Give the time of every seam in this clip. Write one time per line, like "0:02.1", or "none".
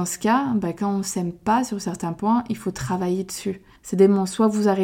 0:03.8